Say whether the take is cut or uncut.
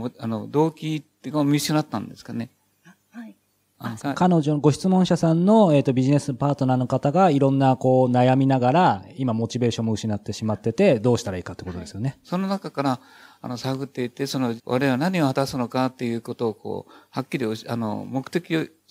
cut